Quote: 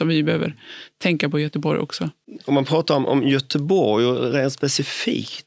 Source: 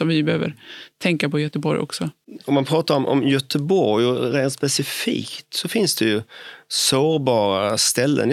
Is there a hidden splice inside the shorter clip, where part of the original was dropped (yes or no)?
no